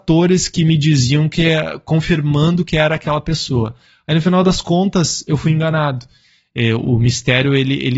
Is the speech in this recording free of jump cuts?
yes; 0 cuts

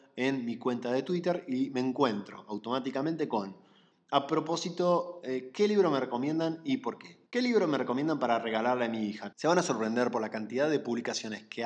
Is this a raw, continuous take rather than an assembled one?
no; 2 cuts; at 7.3 s, 9.3 s

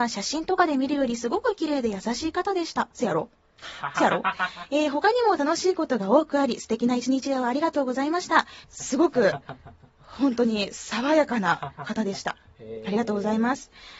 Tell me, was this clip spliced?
yes; 1 cut; at 8.6 s

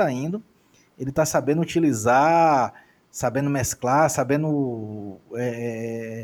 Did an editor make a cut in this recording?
no; 0 cuts

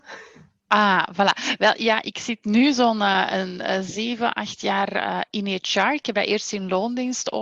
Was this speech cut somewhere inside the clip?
no; 0 cuts

